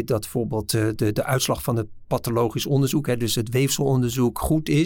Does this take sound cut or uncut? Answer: uncut